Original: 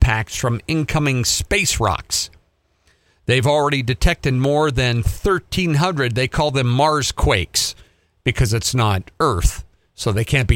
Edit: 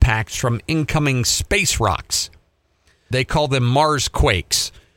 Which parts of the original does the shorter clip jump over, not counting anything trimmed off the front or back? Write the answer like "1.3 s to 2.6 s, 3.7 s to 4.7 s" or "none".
3.1 s to 6.1 s